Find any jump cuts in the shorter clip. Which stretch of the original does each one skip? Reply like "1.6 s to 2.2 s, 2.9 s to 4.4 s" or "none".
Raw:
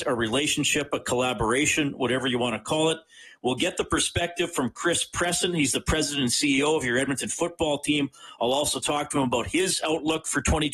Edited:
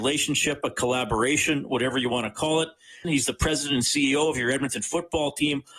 3.3 s to 5.5 s

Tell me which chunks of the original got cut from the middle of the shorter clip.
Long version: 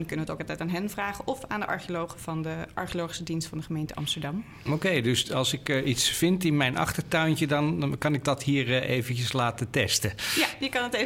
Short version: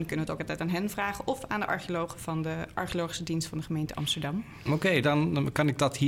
5.0 s to 7.5 s

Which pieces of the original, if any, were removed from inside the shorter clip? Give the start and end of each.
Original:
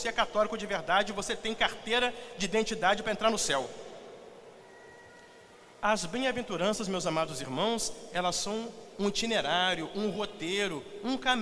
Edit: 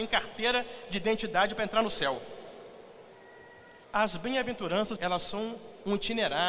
5.3 s to 5.7 s, 6.9 s to 8.1 s

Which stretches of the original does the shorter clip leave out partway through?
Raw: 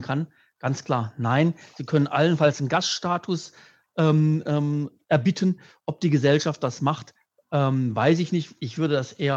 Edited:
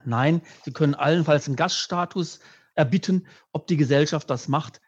3.9 s to 5.1 s

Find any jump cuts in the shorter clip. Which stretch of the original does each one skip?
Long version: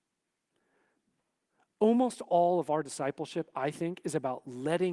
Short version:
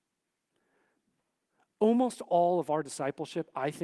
none

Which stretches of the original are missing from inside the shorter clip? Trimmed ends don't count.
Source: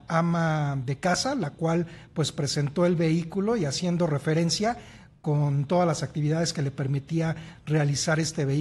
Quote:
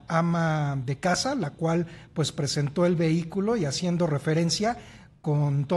none

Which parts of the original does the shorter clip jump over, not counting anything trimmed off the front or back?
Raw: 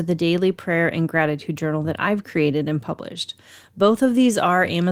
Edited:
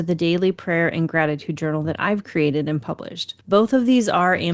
3.4 s to 3.7 s

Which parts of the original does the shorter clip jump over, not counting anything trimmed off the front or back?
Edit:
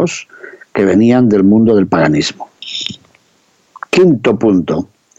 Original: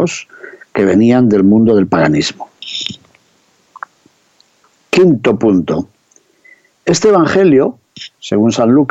3.9 s to 4.9 s

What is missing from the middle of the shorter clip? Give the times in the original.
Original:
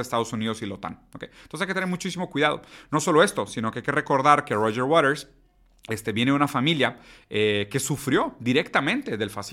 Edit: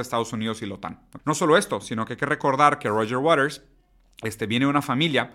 1.2 s to 2.9 s

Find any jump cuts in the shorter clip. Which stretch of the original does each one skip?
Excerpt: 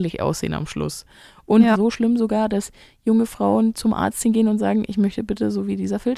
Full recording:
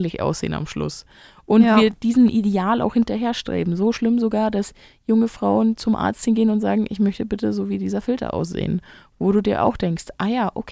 1.7 s to 3.8 s

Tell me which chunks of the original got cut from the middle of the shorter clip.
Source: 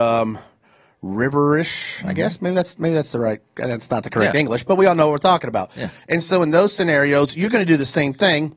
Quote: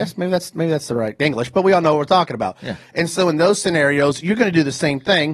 3.4 s to 4.3 s

